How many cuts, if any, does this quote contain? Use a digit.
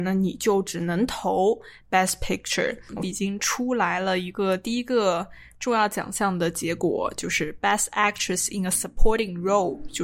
1